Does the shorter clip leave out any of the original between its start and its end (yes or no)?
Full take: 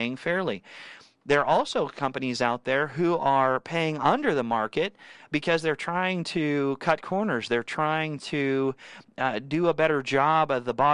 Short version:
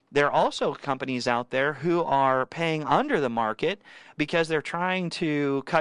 no